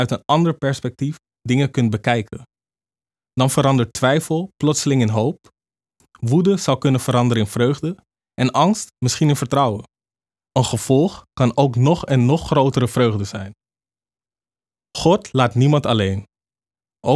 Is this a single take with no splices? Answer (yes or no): yes